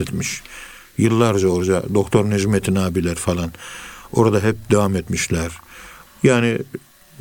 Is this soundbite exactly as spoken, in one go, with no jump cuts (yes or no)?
no